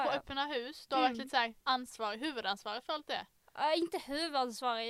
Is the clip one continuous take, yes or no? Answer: no